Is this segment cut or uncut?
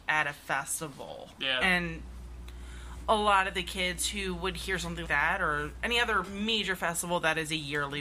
cut